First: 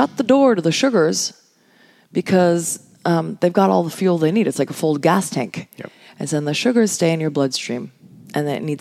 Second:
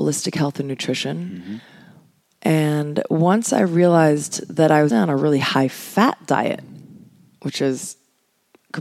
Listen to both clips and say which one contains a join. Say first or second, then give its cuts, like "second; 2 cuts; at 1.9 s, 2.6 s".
second; 1 cut; at 4.9 s